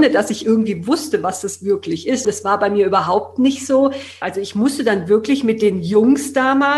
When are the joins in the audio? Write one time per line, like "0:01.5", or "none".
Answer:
0:02.2
0:04.2